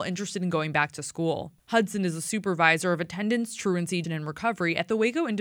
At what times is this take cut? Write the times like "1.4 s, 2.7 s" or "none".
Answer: 1.6 s, 4.0 s